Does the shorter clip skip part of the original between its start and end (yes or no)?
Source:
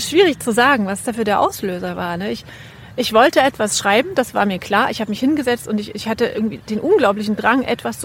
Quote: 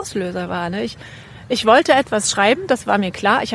no